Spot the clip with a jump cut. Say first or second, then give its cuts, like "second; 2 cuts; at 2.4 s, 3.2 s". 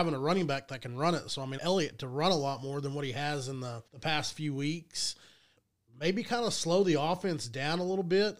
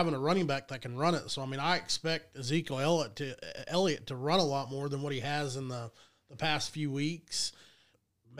first; 2 cuts; at 1.6 s, 3.9 s